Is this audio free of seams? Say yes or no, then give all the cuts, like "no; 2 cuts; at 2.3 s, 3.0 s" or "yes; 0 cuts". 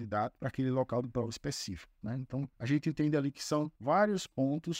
no; 1 cut; at 2.0 s